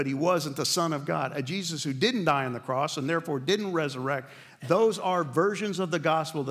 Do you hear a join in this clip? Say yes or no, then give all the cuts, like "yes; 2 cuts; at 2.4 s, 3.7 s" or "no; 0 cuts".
no; 0 cuts